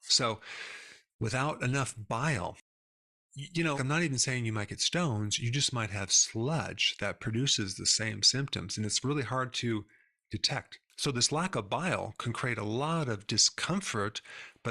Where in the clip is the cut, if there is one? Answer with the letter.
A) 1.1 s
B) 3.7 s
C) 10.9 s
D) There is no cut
B